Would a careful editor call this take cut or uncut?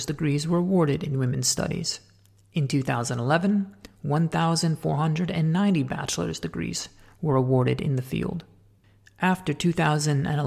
uncut